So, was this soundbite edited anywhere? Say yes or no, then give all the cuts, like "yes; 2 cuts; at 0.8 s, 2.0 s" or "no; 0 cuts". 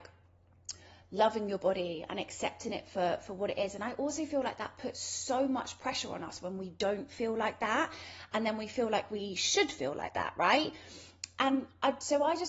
no; 0 cuts